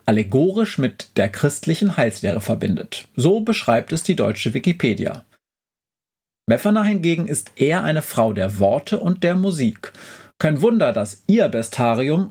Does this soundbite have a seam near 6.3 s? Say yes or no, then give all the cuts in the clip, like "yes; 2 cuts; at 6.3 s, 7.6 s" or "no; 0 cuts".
yes; 1 cut; at 6.3 s